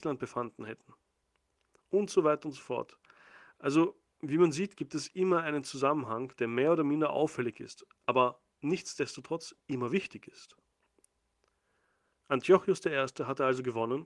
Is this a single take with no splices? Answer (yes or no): yes